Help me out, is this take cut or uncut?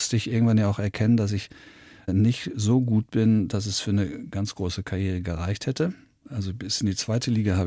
uncut